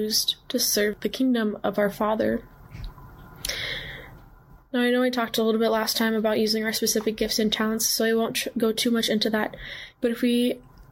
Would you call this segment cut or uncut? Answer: uncut